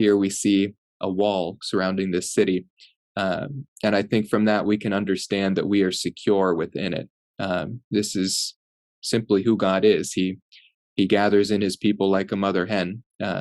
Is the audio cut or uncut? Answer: uncut